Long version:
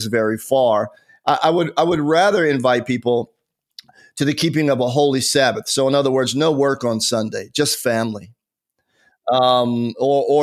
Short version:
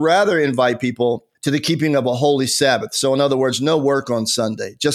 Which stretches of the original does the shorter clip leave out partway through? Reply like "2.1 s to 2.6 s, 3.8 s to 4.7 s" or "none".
3.4 s to 4.1 s